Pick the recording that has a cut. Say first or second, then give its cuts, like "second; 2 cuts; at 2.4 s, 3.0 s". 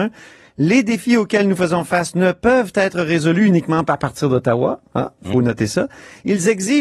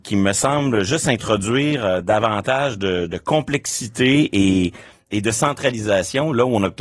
first; 1 cut; at 5.2 s